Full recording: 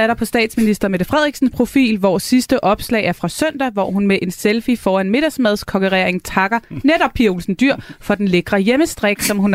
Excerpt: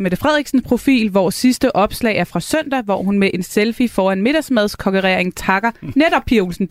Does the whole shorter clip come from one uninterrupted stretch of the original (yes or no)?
yes